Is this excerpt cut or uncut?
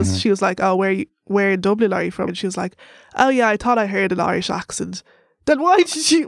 cut